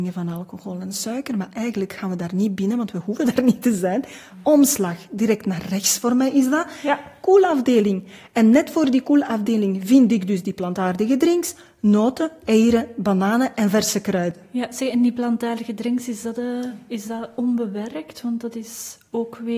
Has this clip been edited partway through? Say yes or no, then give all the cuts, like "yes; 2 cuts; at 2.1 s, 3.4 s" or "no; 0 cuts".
no; 0 cuts